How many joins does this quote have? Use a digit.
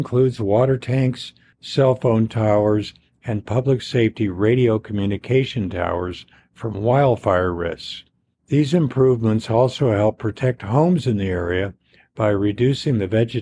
0